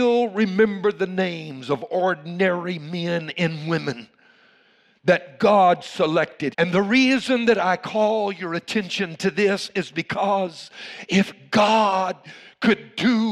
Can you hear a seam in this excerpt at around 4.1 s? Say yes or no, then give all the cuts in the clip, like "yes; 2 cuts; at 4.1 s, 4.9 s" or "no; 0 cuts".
no; 1 cut; at 6.5 s